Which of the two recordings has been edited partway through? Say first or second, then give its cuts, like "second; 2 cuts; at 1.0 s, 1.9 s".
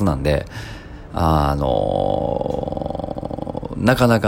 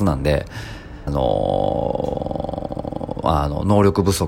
second; 2 cuts; at 1.1 s, 3.2 s